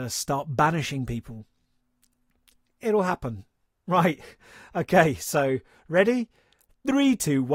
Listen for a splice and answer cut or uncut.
cut